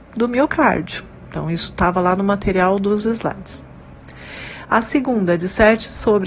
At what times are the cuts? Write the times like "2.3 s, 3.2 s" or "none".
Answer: none